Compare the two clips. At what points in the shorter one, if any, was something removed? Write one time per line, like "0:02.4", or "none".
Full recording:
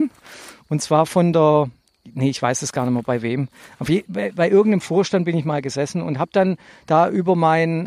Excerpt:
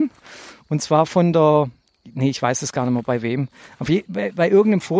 none